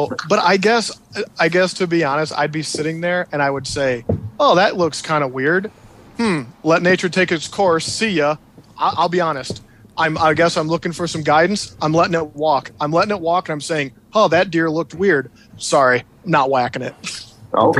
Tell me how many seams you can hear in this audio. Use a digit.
1